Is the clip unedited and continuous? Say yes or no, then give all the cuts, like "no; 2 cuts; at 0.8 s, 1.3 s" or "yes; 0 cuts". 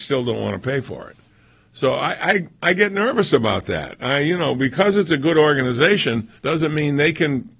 no; 1 cut; at 6.4 s